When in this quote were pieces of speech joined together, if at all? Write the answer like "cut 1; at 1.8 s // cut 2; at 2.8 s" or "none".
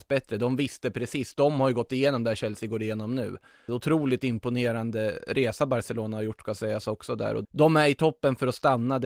cut 1; at 3.7 s // cut 2; at 7.4 s